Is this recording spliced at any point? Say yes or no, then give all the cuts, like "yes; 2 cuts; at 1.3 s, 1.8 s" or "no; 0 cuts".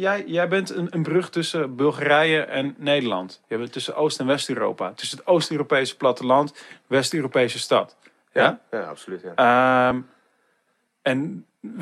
no; 0 cuts